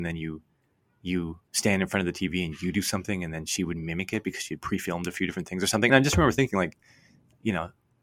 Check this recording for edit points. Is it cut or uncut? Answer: uncut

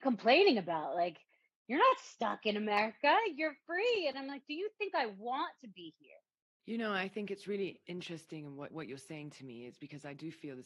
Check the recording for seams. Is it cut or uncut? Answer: cut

